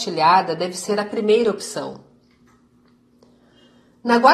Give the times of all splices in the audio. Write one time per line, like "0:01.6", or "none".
none